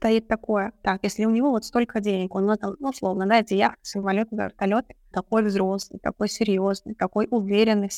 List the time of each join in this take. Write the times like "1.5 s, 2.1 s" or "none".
5.1 s